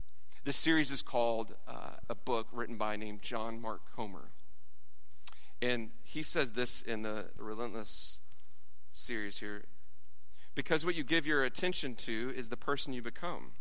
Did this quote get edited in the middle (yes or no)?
yes